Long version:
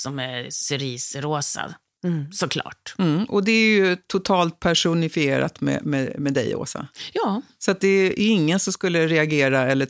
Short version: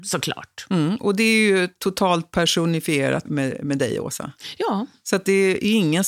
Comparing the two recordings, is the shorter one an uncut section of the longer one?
no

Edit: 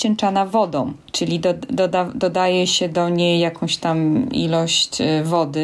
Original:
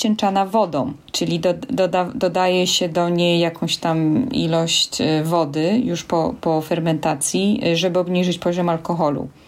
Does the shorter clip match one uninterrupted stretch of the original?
yes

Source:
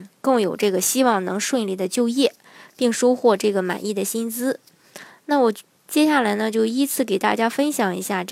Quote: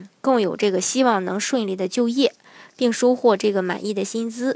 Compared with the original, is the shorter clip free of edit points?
yes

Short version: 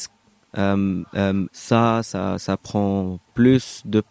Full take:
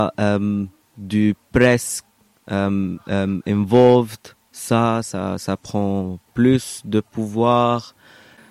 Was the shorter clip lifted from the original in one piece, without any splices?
no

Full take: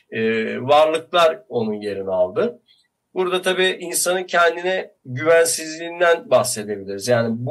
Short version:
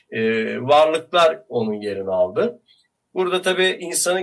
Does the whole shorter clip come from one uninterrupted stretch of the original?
yes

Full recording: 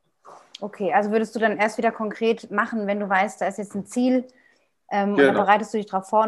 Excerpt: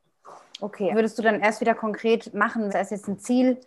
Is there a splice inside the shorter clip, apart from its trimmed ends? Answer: yes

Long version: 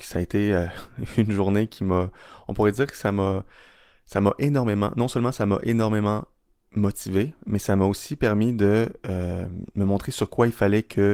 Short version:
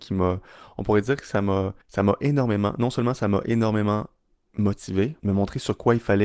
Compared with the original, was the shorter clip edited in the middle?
yes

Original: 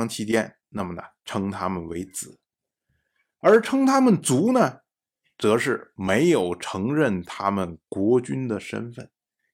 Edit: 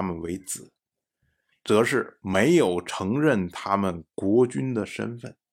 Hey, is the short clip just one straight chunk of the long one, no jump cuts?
no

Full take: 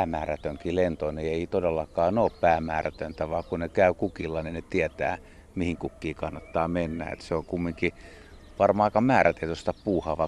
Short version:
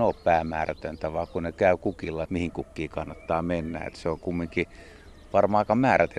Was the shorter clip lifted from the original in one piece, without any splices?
no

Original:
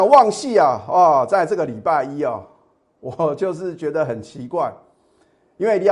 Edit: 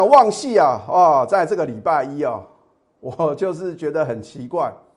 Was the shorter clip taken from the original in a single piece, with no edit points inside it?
yes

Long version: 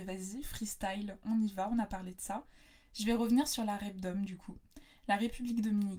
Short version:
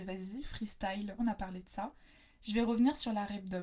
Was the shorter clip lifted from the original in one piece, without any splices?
no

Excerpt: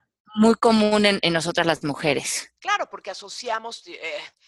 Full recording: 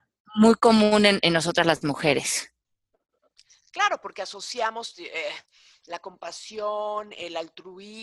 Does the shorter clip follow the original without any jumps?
no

